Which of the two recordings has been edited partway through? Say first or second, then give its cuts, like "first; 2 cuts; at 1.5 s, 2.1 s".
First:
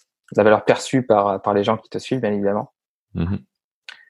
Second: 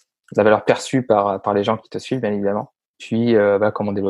second; 1 cut; at 2.9 s